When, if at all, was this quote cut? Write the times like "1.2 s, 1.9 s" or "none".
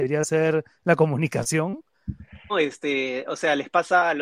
2.5 s